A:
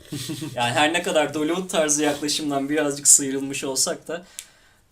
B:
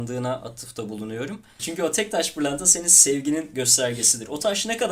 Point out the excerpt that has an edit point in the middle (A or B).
B